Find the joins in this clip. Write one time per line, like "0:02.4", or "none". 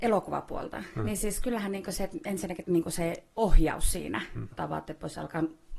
0:02.6
0:04.5

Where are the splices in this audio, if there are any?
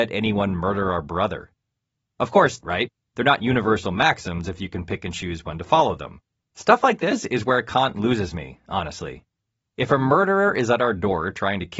0:02.6
0:06.4

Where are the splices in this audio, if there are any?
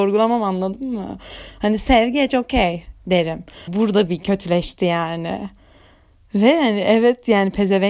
0:03.7

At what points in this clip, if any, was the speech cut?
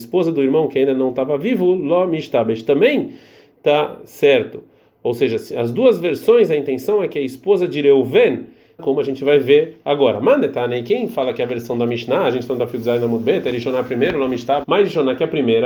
0:08.8
0:14.6

